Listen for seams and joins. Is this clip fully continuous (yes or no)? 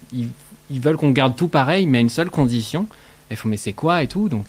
yes